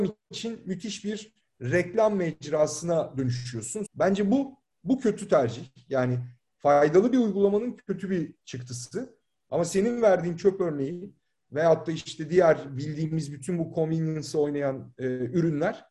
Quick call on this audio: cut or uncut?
cut